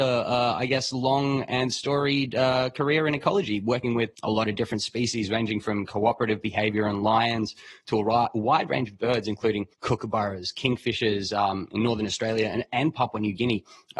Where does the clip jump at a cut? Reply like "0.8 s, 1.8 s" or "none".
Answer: 9.7 s